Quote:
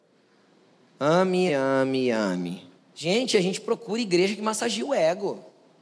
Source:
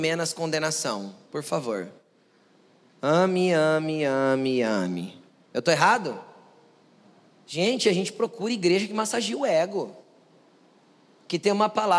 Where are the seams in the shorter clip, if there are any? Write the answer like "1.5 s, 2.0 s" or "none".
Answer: 1.5 s, 2.9 s